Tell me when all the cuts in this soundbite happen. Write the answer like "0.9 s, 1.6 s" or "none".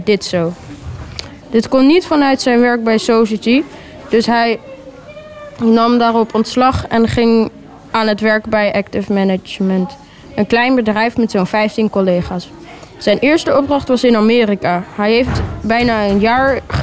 1.4 s